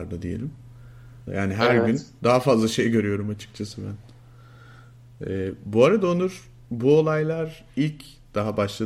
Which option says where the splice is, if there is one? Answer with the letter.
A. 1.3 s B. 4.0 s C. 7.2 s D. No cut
A